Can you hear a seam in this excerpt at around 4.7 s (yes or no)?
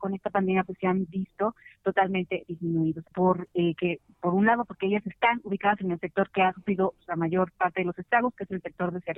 no